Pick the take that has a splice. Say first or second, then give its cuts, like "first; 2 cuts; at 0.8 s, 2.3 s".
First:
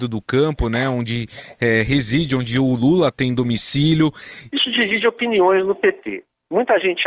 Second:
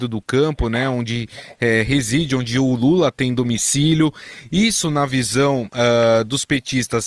first; 1 cut; at 4.5 s